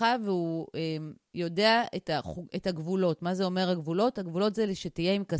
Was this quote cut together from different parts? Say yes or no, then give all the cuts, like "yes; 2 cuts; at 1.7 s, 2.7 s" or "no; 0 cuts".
no; 0 cuts